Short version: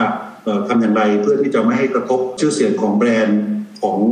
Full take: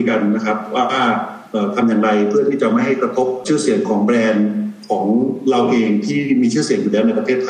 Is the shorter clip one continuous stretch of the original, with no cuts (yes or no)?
yes